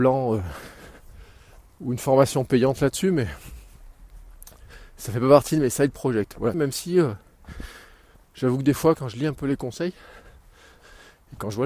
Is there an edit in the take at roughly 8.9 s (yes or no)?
yes